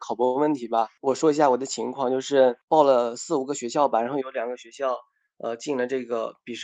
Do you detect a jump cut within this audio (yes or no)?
no